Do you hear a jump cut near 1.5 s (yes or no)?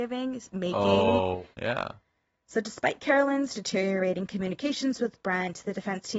yes